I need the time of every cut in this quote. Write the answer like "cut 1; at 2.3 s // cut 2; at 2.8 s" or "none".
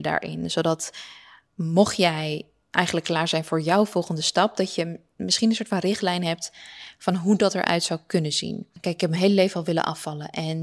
none